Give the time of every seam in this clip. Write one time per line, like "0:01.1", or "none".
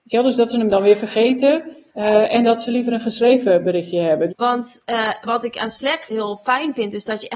0:01.9
0:04.3
0:06.1

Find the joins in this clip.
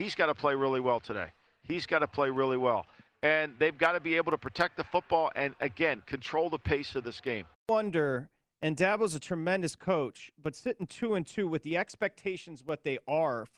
0:07.5

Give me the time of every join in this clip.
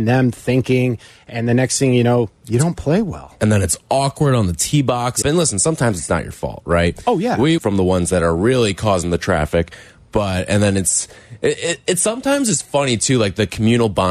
0:05.2
0:07.6

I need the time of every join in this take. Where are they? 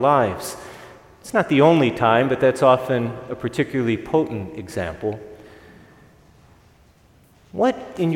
none

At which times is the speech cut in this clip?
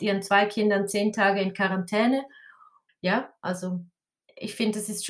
0:02.9

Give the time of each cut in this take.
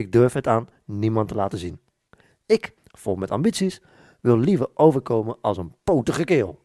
0:02.8

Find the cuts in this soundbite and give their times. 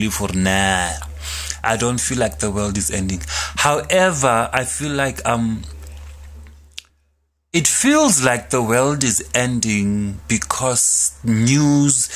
none

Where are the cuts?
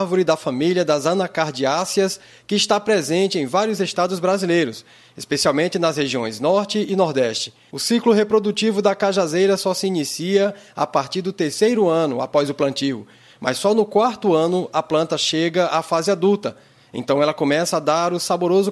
0:07.7

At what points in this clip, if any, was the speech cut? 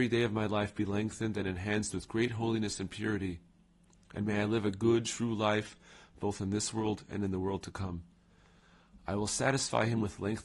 none

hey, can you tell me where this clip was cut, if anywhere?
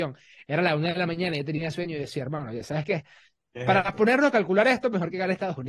none

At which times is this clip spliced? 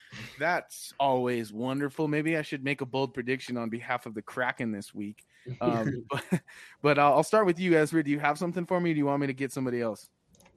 none

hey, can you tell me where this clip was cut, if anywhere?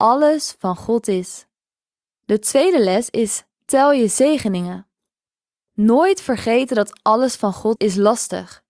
0:07.8

